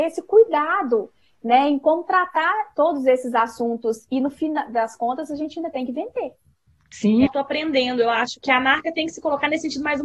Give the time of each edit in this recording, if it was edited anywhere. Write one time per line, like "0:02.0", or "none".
0:07.3
0:08.4

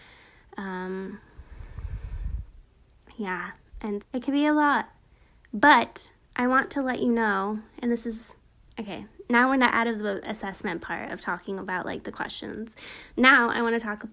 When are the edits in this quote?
0:04.0

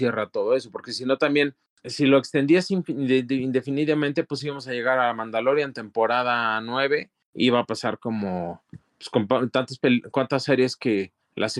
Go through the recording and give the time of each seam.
none

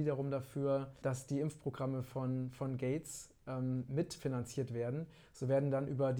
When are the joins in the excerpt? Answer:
0:01.0

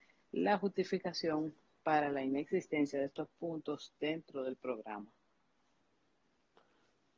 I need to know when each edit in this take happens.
none

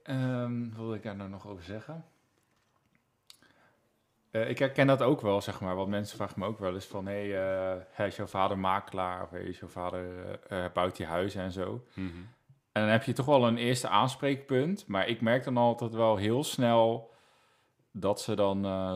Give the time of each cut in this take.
none

